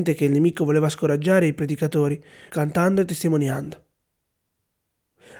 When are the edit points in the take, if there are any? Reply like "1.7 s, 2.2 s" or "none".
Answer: 2.5 s